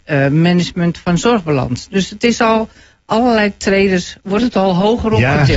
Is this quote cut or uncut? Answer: uncut